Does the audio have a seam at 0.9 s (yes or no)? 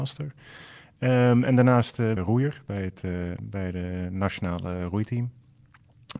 no